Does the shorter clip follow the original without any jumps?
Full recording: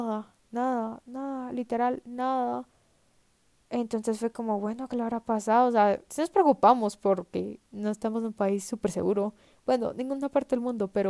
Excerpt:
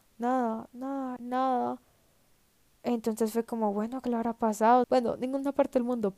no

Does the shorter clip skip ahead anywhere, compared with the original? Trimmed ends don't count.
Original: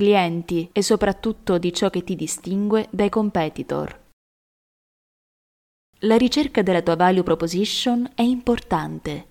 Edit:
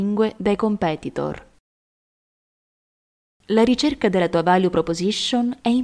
no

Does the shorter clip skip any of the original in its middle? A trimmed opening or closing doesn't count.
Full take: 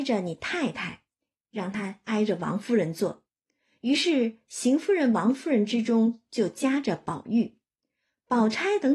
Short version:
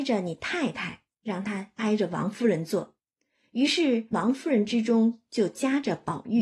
yes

